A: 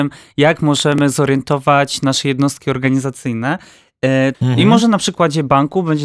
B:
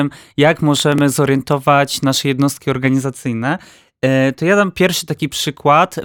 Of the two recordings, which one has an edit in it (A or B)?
A